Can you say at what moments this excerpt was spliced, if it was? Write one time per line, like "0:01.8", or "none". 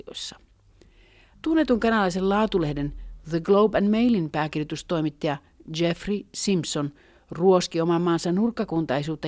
0:01.3